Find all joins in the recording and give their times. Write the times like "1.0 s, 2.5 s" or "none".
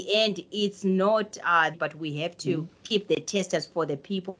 1.7 s